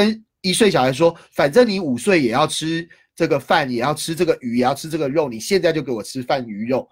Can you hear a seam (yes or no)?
no